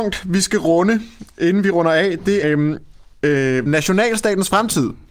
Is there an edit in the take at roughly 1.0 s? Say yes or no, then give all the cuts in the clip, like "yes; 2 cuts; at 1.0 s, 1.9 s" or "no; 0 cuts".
no; 2 cuts; at 2.4 s, 3.7 s